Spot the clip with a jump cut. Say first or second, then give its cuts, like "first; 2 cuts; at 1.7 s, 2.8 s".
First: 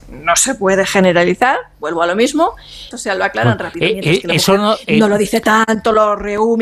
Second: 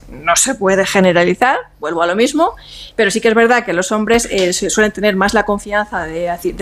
first; 1 cut; at 2.9 s